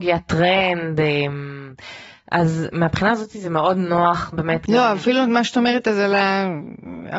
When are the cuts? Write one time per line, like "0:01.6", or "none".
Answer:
none